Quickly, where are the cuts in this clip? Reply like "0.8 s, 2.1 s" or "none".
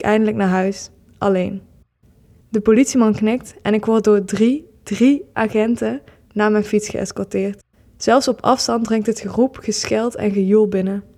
2.4 s